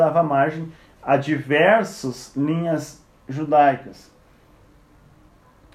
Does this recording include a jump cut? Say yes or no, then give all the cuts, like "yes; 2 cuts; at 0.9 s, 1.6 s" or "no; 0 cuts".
no; 0 cuts